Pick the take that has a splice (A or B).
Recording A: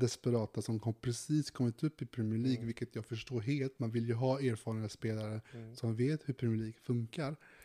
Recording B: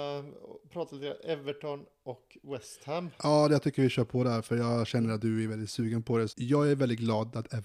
B